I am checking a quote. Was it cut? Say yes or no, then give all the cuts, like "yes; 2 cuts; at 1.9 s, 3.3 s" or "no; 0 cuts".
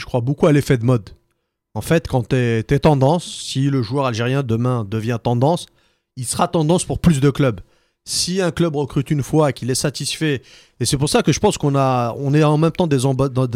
no; 0 cuts